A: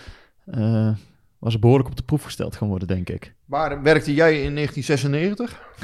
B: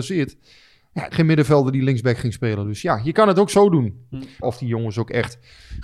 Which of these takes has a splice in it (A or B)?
B